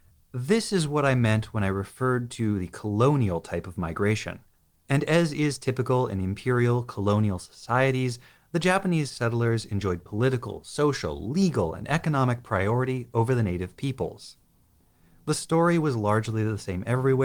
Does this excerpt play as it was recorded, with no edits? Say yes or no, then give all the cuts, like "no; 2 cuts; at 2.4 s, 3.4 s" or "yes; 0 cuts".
yes; 0 cuts